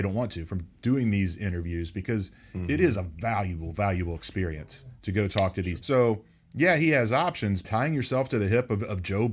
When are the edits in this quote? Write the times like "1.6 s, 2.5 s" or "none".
5.8 s, 7.6 s